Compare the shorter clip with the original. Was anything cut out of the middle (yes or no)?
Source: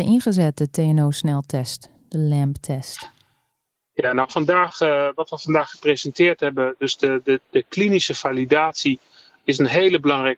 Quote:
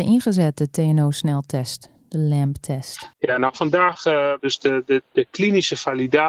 yes